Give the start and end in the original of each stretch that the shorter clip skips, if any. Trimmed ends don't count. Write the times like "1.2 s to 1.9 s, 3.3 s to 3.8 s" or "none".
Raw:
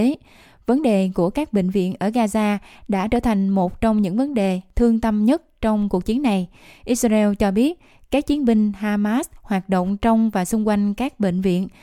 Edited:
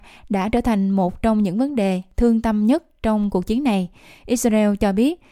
none